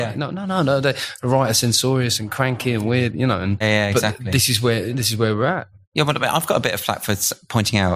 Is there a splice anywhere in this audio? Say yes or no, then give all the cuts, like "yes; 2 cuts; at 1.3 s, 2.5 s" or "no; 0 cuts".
yes; 1 cut; at 3.6 s